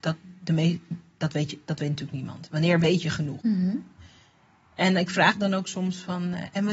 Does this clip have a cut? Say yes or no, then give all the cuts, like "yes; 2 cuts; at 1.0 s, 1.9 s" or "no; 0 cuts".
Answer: yes; 1 cut; at 3.4 s